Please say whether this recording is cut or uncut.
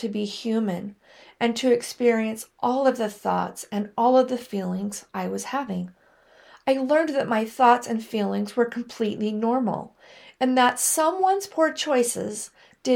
uncut